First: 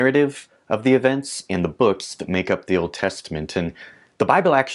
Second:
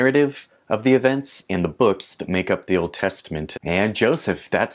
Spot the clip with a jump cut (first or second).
second